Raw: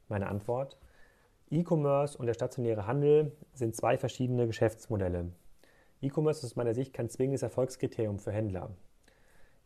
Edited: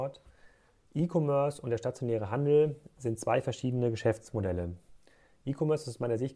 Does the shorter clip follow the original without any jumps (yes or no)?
yes